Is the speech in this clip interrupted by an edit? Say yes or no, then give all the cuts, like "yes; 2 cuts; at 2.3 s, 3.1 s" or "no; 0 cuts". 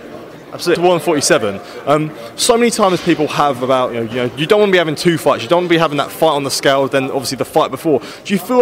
yes; 1 cut; at 4.1 s